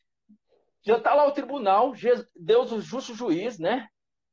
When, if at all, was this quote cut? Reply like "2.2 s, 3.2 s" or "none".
none

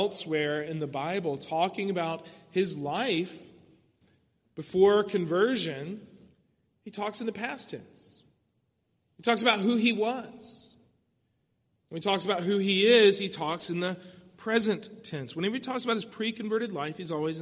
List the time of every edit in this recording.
none

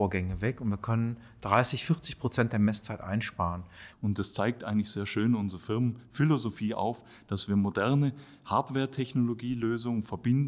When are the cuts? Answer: 3.9 s

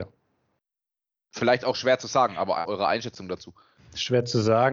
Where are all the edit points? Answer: 1.2 s, 2.6 s

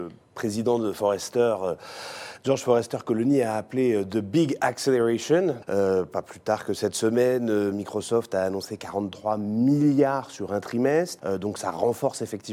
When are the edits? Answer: 5.6 s, 11.2 s

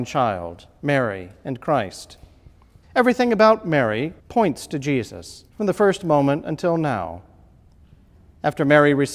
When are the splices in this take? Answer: 2.8 s, 4.2 s, 5.5 s

